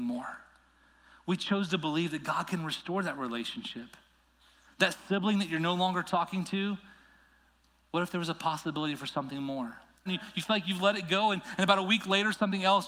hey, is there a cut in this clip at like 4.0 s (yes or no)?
no